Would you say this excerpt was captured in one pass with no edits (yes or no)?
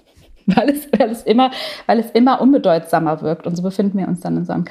yes